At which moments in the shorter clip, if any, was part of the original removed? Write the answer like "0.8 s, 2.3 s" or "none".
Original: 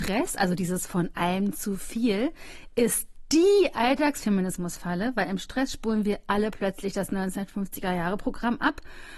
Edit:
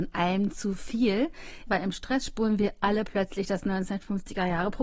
1.7 s